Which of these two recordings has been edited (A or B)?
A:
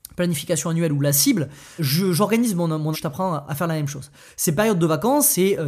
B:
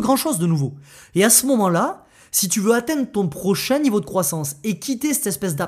A